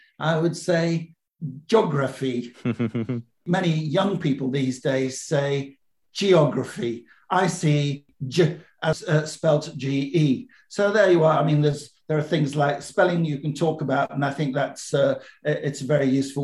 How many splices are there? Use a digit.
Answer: 0